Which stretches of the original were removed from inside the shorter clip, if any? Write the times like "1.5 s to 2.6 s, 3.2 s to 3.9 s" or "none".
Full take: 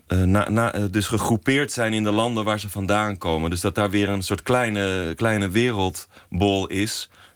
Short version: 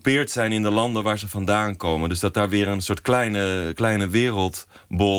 none